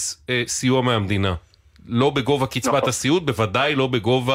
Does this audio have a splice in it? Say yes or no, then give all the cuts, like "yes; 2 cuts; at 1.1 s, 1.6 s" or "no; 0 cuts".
no; 0 cuts